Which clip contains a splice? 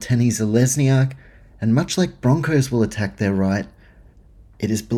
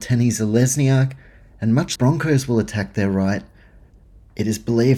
second; 1 cut; at 2.0 s

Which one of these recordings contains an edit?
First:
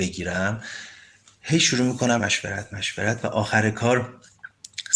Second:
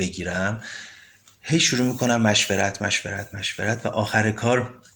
first; 1 cut; at 2.2 s

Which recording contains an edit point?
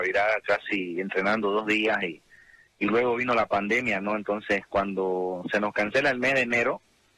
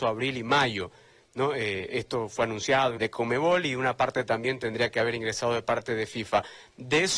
second; 1 cut; at 3.0 s

